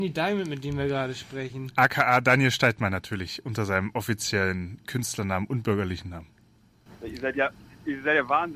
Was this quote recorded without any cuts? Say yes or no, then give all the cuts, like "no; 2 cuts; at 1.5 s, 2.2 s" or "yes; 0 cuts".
yes; 0 cuts